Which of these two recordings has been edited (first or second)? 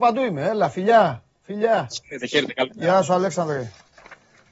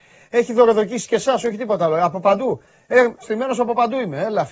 second